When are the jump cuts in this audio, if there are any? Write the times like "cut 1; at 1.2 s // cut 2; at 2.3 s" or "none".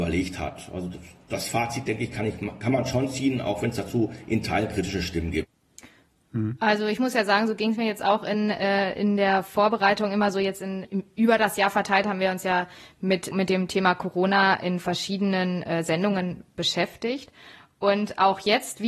cut 1; at 10.8 s // cut 2; at 13.3 s